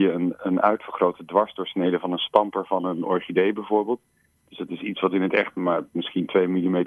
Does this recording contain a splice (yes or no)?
no